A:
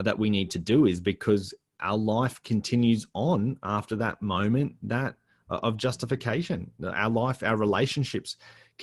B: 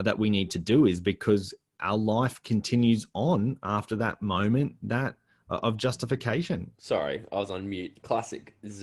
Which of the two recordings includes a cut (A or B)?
B